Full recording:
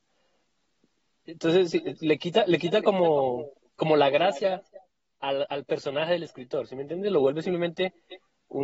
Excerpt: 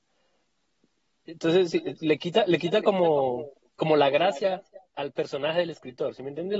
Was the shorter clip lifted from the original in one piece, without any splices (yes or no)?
no